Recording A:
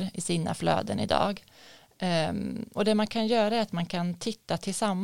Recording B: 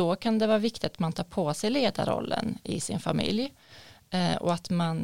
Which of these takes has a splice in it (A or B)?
A